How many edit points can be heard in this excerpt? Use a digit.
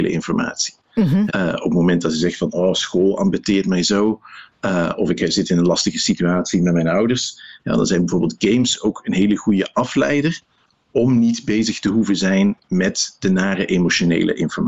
1